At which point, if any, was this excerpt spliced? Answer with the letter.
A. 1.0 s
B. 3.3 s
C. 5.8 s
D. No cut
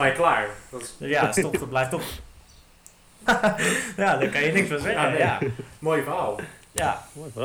B